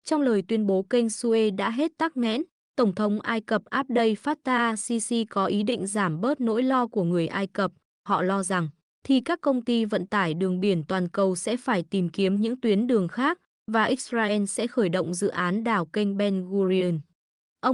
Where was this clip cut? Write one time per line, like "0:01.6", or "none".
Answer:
0:08.9

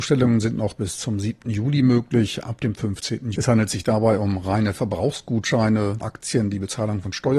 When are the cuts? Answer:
0:03.3
0:06.0

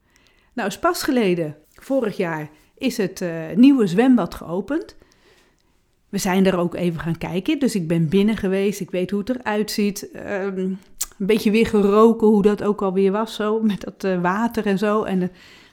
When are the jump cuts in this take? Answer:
0:01.6

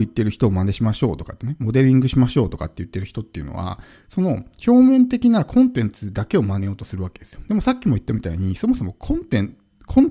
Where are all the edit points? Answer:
none

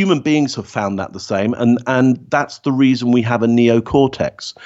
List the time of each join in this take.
none

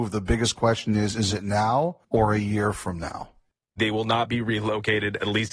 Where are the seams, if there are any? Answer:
0:02.0
0:03.8

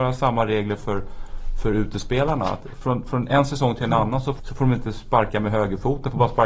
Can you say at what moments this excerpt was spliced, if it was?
0:04.4

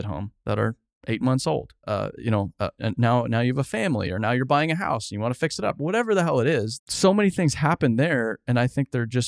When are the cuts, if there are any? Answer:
0:01.8
0:06.8

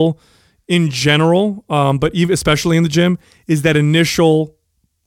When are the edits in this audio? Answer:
none

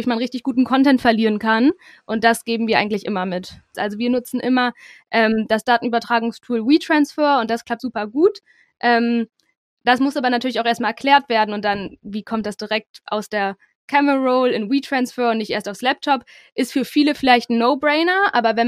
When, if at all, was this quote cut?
0:03.7
0:07.8

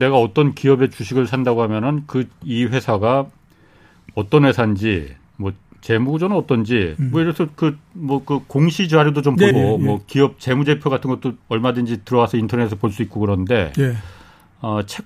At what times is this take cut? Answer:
0:09.5
0:11.4

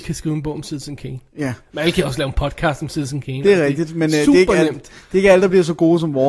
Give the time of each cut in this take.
none

